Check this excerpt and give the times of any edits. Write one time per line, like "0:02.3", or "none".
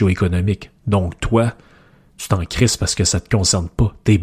none